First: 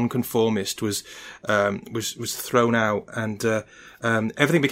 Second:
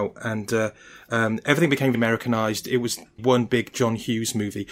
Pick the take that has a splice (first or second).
second